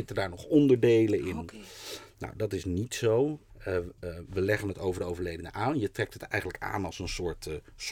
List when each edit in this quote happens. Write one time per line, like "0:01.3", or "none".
0:03.5